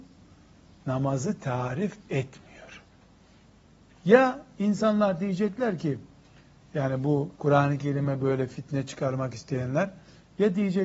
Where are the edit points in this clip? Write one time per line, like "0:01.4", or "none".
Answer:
0:03.9
0:07.3